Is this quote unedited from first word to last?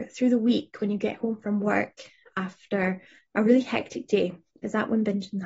yes; 0 cuts

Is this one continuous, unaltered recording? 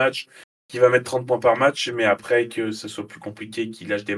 yes; 0 cuts

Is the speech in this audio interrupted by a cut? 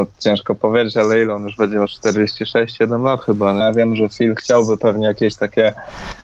yes; 1 cut; at 3.6 s

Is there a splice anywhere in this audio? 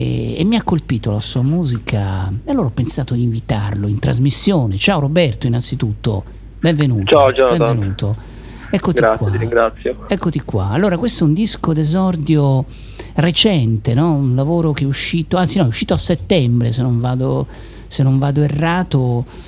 no; 0 cuts

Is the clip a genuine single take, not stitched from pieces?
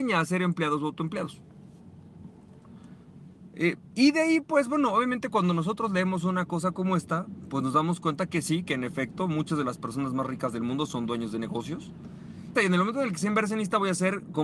no; 1 cut; at 12.5 s

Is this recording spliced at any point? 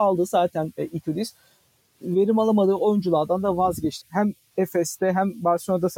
yes; 1 cut; at 4.0 s

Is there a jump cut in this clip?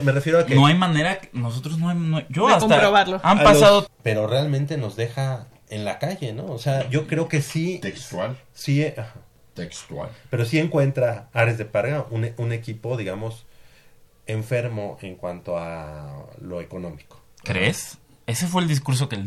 yes; 1 cut; at 3.9 s

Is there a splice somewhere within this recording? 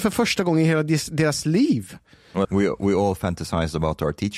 yes; 1 cut; at 2.4 s

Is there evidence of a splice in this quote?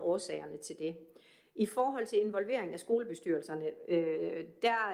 no; 0 cuts

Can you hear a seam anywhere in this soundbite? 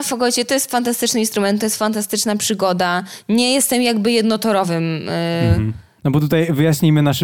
yes; 1 cut; at 6.0 s

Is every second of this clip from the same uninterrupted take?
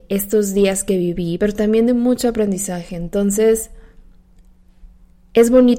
no; 1 cut; at 1.4 s

